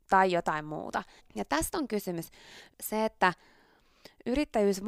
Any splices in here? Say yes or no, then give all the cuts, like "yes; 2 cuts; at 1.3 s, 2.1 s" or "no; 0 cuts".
yes; 2 cuts; at 1.2 s, 2.7 s